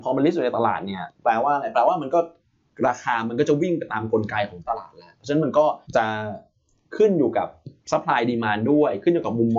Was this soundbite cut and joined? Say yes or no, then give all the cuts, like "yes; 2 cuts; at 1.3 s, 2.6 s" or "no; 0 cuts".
yes; 2 cuts; at 5.8 s, 7.8 s